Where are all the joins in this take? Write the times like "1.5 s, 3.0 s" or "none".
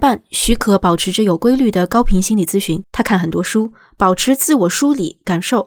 2.9 s